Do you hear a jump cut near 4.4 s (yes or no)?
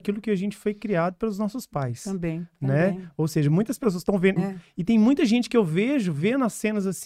yes